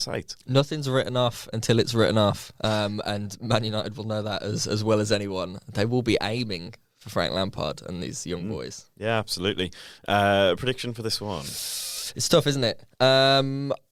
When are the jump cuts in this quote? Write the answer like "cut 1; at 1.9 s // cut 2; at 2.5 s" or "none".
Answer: none